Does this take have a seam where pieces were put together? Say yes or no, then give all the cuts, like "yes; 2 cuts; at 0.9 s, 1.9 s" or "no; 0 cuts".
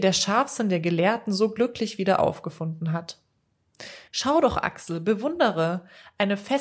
yes; 1 cut; at 4.1 s